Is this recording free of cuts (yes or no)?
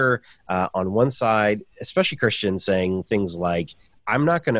yes